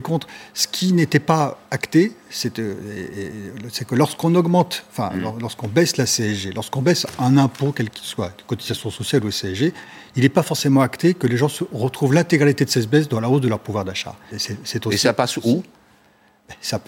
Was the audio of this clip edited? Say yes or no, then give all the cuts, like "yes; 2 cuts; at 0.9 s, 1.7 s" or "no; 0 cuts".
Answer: yes; 1 cut; at 14.3 s